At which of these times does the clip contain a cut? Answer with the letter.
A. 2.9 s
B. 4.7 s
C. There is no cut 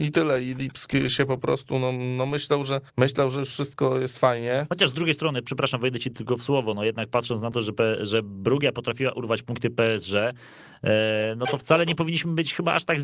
A